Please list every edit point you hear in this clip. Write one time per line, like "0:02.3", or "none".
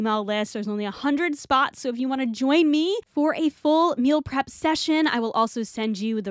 none